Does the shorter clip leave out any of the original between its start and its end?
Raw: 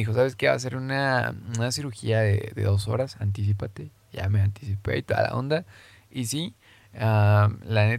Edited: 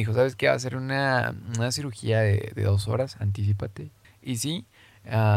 yes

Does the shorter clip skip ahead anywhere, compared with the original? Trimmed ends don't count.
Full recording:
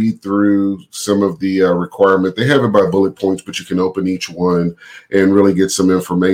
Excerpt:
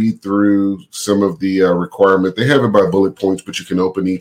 no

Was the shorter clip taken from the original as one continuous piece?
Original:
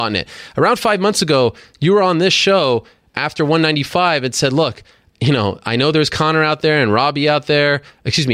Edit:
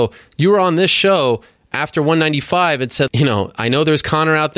no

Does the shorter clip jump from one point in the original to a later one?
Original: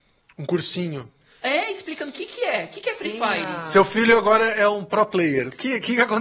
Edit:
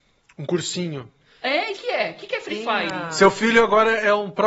yes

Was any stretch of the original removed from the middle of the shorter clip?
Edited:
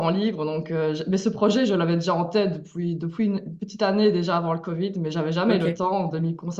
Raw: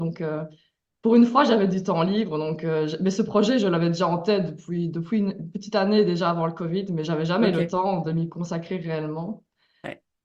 no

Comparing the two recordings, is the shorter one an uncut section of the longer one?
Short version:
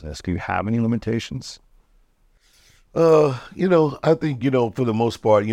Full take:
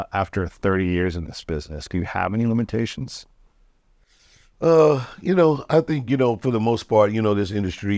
yes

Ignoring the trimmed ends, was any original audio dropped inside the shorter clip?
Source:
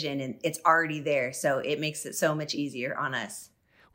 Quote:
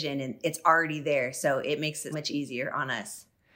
yes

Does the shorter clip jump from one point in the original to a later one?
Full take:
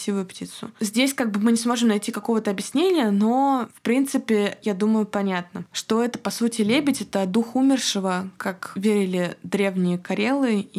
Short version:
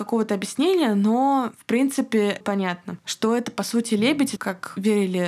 yes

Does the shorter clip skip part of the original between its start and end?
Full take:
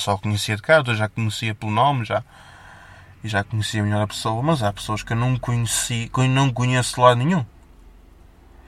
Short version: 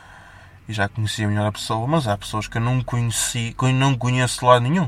no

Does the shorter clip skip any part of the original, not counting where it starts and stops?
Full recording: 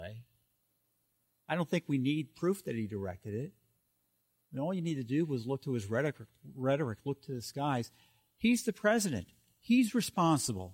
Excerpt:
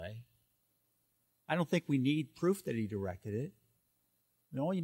no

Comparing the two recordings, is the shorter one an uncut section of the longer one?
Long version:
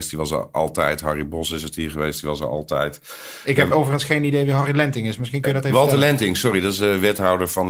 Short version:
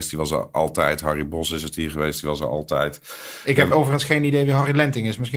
yes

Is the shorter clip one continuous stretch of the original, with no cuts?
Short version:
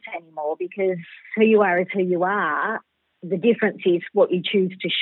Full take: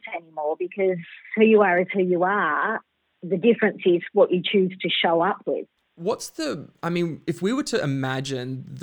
yes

